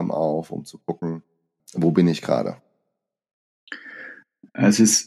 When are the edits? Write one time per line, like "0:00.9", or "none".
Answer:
0:01.6